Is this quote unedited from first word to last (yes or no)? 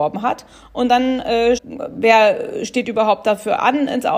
no